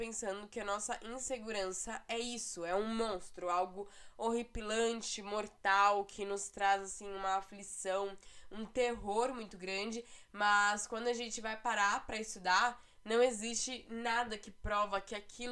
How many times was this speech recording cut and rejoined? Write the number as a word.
zero